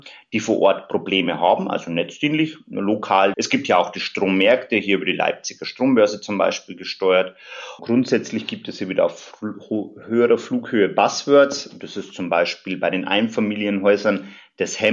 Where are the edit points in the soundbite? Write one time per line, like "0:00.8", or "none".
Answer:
0:03.3
0:07.8